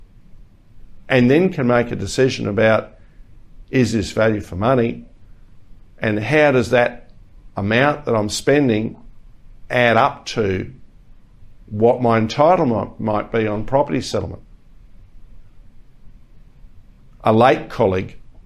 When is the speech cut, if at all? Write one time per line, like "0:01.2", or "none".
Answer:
none